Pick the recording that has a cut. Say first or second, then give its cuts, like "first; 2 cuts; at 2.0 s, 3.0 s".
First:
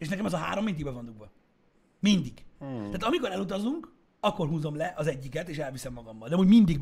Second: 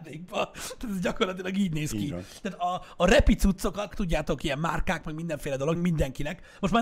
second; 2 cuts; at 3.9 s, 5.8 s